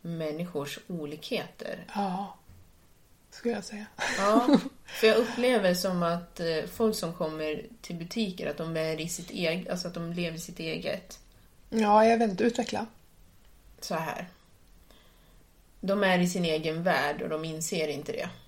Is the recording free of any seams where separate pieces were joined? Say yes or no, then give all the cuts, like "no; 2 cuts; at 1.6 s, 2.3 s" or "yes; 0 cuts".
no; 2 cuts; at 1.9 s, 11.5 s